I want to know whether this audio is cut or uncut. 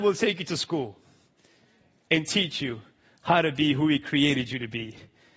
uncut